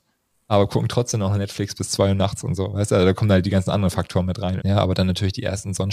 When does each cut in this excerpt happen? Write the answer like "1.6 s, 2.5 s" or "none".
4.6 s

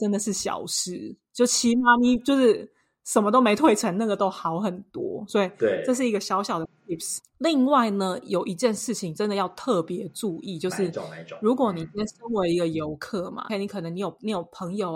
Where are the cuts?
7.2 s, 13.5 s

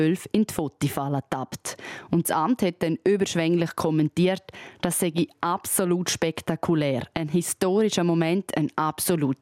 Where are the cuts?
none

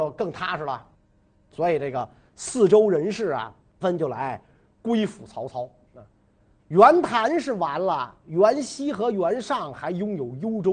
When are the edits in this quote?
3.8 s

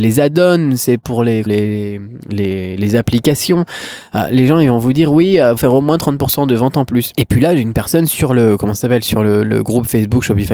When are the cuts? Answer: 1.5 s, 5.6 s, 7.1 s

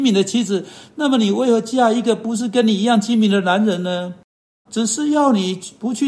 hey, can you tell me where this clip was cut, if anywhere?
4.7 s

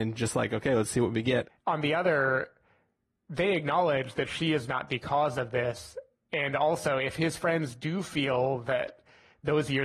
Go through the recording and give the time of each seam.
1.5 s

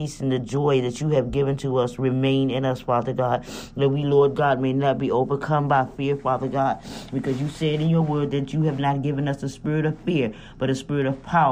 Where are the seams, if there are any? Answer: none

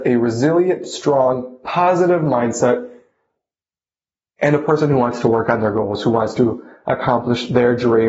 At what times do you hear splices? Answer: none

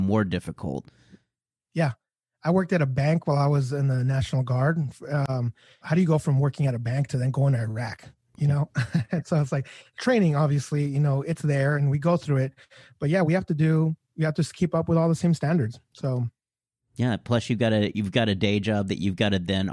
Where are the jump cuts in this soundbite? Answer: 5.8 s, 11.7 s

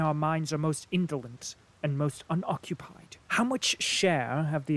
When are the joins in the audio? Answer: 3.2 s

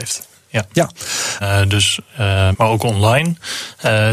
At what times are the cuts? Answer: 1.4 s, 2.5 s

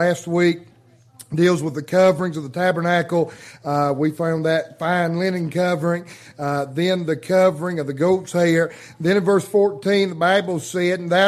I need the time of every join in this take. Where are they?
none

